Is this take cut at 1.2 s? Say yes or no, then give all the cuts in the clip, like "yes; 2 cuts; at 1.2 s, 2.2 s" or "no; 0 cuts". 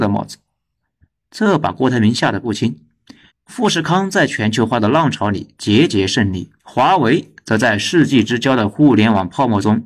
no; 2 cuts; at 3.3 s, 6.6 s